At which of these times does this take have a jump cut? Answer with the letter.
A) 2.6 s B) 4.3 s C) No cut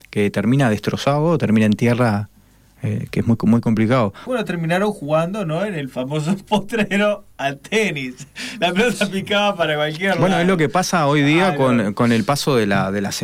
B